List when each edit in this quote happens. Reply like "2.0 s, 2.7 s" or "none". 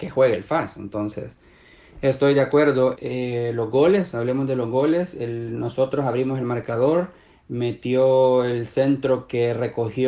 3.0 s, 7.3 s